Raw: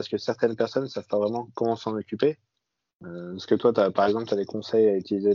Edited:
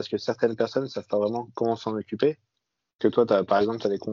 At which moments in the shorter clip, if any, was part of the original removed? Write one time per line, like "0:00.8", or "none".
0:03.0